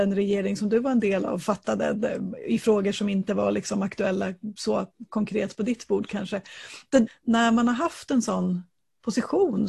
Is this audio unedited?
no; 1 cut; at 7.1 s

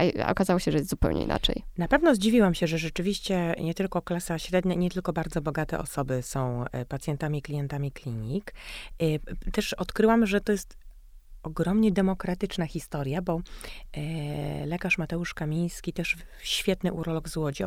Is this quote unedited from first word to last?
yes; 0 cuts

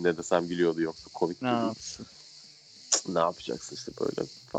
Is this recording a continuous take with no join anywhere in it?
yes; 0 cuts

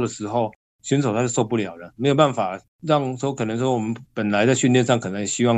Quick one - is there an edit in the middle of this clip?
no; 0 cuts

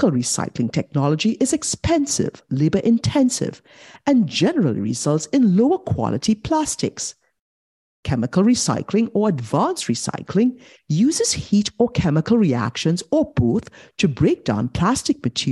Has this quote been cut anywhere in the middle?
no; 0 cuts

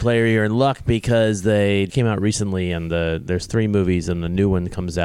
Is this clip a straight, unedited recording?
no; 1 cut; at 1.9 s

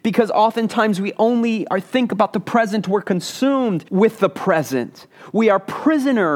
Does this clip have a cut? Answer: no; 0 cuts

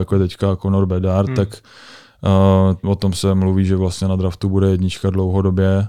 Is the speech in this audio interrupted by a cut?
yes; 1 cut; at 2.8 s

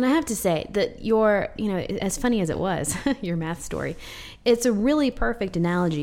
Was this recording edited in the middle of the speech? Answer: no; 0 cuts

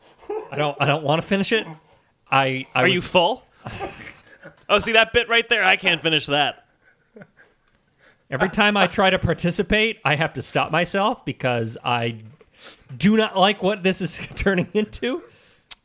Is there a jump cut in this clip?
no; 0 cuts

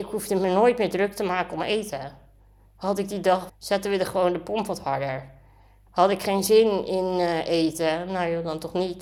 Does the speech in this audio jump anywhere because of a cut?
yes; 1 cut; at 3.5 s

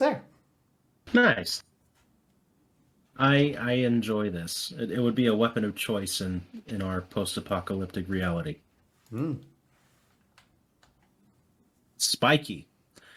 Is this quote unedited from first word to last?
yes; 0 cuts

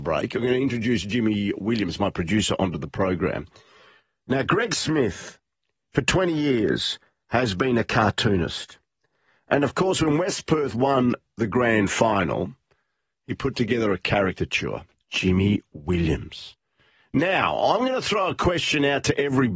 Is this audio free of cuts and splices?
no; 1 cut; at 15.0 s

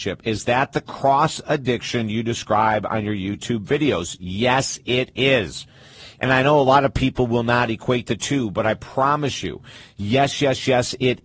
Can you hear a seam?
no; 0 cuts

